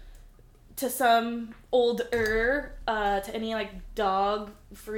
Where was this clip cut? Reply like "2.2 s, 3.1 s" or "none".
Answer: none